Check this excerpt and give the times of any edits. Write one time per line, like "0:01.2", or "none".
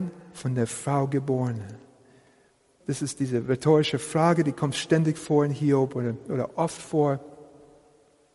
0:02.8